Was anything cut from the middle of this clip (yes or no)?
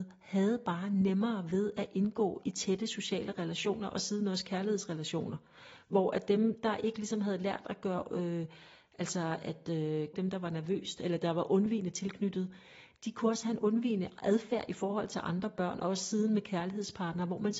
yes